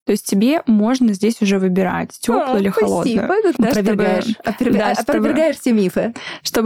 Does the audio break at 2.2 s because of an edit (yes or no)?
no